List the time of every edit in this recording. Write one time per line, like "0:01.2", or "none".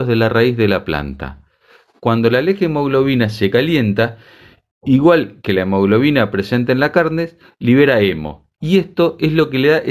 none